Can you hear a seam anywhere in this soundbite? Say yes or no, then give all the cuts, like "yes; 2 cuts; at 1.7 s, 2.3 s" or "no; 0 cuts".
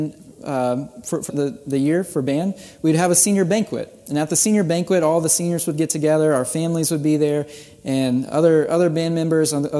yes; 1 cut; at 1.3 s